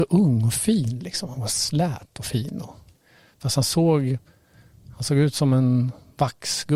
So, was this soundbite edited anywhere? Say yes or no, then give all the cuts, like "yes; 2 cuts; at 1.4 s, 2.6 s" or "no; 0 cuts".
no; 0 cuts